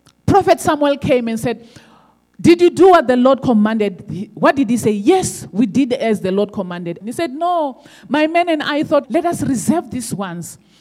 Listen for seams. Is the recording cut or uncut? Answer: cut